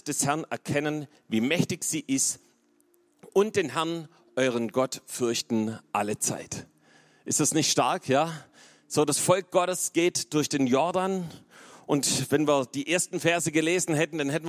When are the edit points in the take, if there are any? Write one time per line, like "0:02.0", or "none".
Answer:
none